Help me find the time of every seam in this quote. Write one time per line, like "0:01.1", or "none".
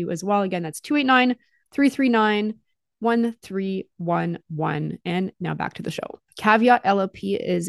0:06.3